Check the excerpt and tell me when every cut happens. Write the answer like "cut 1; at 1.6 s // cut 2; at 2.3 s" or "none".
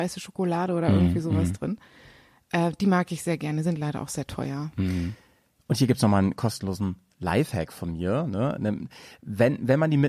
none